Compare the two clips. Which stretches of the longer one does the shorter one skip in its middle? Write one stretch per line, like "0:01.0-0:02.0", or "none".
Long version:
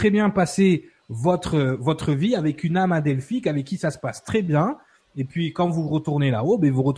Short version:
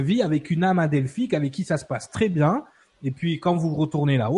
none